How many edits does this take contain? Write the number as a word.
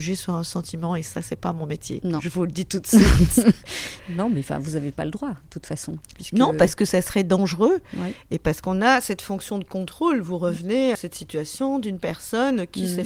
one